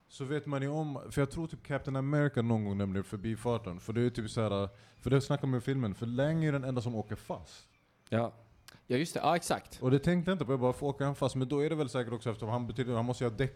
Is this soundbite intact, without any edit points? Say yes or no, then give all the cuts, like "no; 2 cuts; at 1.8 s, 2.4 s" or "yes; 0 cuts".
yes; 0 cuts